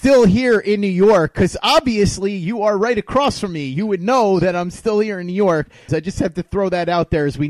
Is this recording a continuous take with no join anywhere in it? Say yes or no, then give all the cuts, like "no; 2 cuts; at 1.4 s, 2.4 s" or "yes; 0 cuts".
no; 1 cut; at 5.9 s